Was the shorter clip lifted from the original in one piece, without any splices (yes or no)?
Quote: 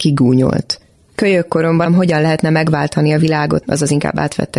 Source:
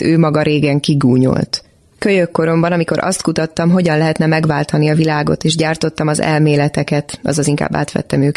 no